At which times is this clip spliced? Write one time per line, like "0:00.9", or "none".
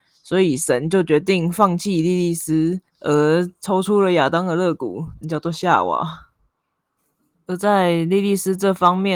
0:02.9
0:05.2